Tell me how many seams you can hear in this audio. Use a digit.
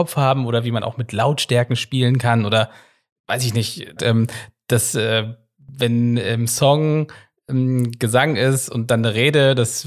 1